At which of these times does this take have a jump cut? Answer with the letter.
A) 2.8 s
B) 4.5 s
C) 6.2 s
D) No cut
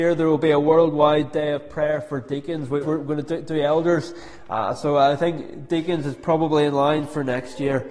A